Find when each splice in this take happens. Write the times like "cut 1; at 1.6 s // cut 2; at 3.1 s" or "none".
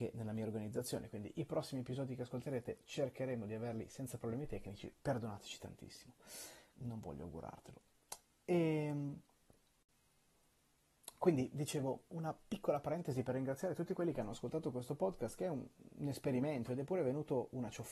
cut 1; at 4.9 s // cut 2; at 6.7 s